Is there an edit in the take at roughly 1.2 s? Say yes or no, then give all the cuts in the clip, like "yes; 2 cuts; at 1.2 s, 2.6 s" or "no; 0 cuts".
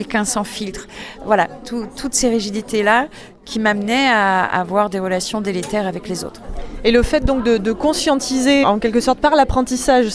no; 2 cuts; at 7.6 s, 8.6 s